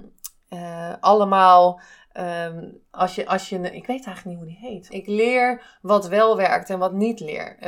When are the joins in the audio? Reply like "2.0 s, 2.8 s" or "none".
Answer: 4.9 s